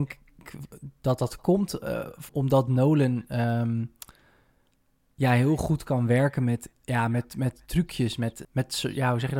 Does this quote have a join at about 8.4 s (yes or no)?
yes